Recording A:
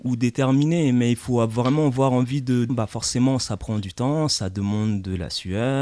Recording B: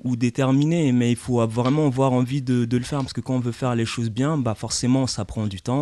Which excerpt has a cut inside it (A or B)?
A